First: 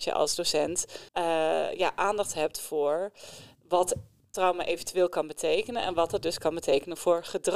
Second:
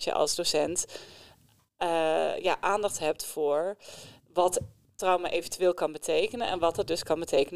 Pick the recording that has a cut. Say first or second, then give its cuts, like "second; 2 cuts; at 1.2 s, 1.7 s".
first; 1 cut; at 1.1 s